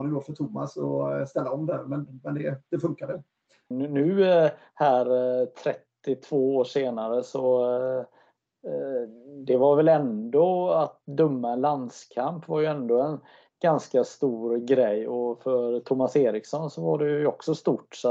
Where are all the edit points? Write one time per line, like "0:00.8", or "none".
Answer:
0:03.7